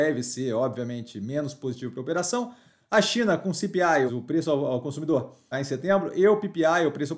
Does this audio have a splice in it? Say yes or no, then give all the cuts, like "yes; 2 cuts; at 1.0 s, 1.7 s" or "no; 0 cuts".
yes; 2 cuts; at 4.1 s, 5.5 s